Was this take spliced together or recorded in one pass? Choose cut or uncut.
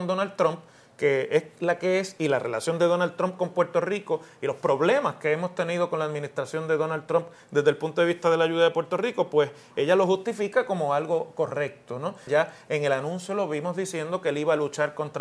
cut